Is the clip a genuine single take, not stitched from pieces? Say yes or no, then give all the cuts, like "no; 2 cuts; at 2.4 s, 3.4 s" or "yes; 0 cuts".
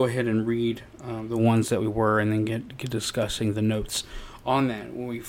yes; 0 cuts